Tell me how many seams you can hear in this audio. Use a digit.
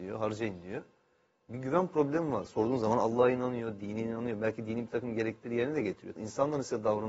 2